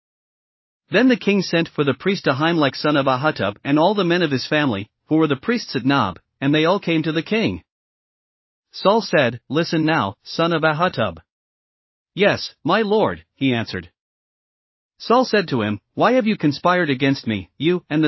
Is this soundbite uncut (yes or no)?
yes